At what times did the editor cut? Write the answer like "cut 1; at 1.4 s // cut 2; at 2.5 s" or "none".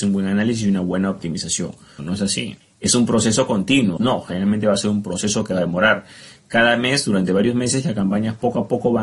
cut 1; at 2.0 s // cut 2; at 4.0 s